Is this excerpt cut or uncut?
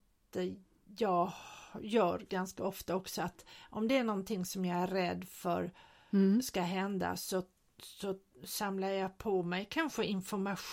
uncut